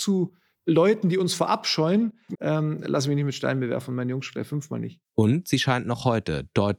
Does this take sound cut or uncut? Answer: cut